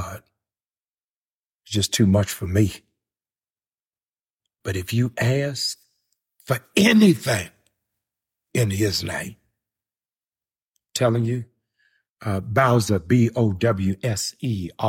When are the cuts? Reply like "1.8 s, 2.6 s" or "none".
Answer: none